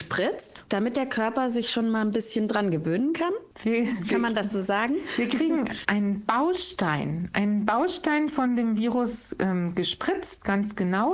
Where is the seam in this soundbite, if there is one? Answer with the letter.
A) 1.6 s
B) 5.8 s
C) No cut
B